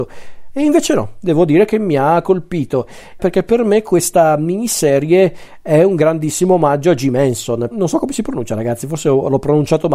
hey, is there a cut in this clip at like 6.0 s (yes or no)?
no